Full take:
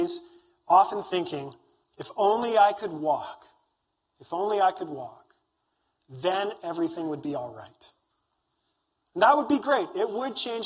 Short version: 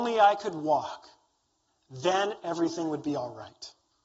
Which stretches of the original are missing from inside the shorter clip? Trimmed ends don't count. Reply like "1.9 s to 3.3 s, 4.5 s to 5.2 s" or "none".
4.0 s to 5.9 s